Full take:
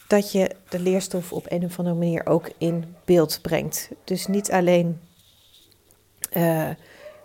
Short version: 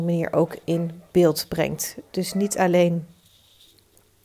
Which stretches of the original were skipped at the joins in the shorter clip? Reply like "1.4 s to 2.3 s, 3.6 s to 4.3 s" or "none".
none